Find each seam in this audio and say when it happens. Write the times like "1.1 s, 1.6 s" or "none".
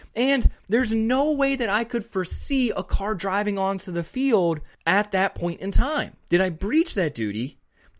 4.7 s, 6.2 s